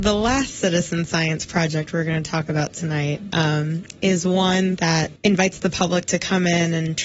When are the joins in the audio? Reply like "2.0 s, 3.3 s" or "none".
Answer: 5.2 s